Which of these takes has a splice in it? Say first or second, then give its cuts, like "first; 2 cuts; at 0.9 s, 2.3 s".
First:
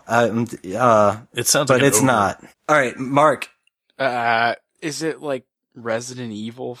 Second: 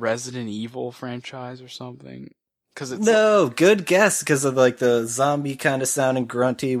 first; 1 cut; at 2.5 s